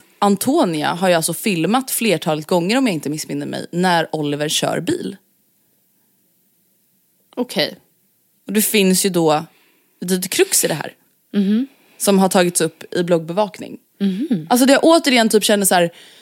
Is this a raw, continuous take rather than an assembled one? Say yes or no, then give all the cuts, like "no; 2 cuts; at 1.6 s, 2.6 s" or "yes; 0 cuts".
no; 1 cut; at 8.4 s